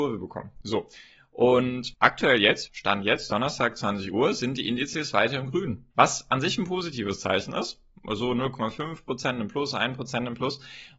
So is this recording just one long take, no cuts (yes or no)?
no